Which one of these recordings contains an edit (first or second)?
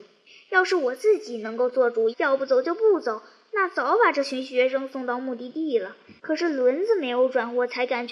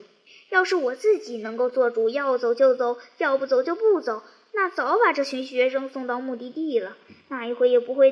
first